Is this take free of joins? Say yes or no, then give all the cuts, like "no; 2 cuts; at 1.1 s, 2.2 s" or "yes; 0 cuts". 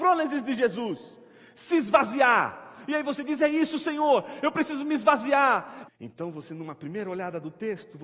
no; 1 cut; at 5.8 s